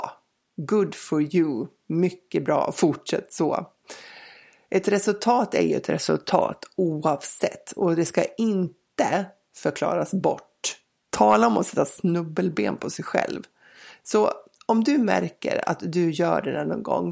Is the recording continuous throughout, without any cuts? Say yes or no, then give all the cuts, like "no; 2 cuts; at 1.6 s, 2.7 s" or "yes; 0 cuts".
no; 1 cut; at 11.1 s